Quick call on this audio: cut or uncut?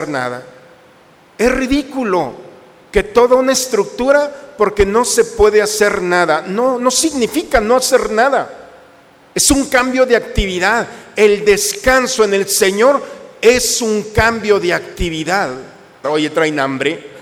cut